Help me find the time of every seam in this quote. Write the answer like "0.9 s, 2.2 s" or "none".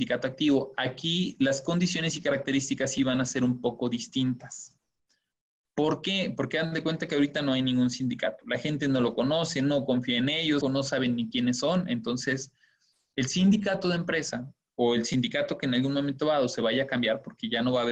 10.6 s